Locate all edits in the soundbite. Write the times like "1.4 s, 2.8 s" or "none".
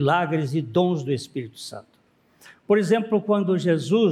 2.5 s